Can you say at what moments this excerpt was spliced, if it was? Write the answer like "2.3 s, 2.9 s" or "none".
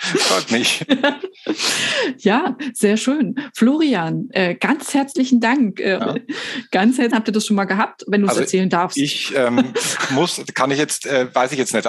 6.0 s, 7.1 s

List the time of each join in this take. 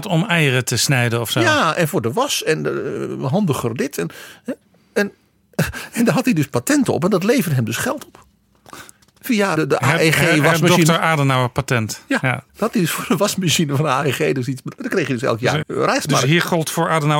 9.6 s, 12.5 s, 15.6 s

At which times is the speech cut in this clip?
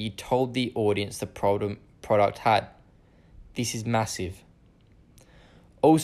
none

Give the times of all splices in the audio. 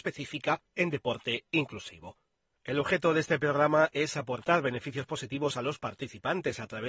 2.6 s

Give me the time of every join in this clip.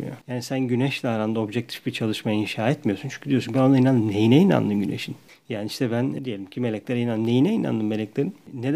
none

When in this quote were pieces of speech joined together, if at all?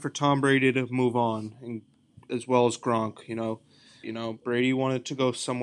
4.0 s

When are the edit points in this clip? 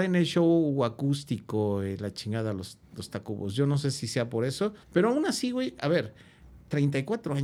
4.8 s

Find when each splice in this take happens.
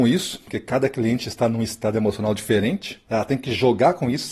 3.1 s

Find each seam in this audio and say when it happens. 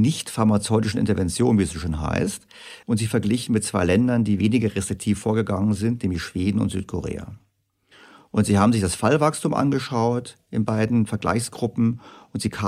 2.8 s

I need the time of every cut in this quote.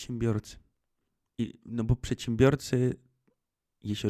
1.3 s

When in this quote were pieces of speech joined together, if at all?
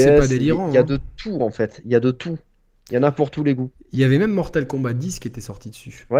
none

